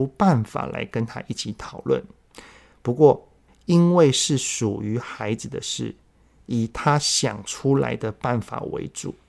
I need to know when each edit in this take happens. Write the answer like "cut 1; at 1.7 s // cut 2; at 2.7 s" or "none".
none